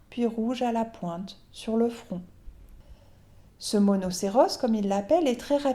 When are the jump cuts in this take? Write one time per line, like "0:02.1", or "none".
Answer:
none